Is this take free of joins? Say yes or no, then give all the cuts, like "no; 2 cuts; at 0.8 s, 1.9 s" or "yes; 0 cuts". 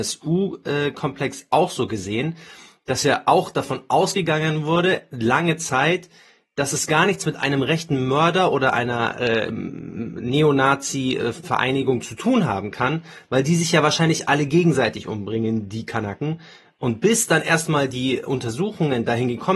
yes; 0 cuts